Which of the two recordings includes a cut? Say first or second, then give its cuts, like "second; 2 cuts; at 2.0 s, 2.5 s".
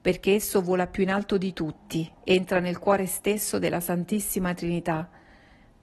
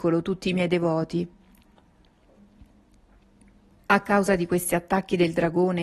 first; 1 cut; at 2.1 s